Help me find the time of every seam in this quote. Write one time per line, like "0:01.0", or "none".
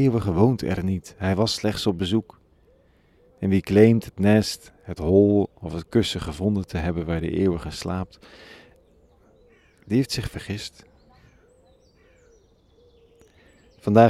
none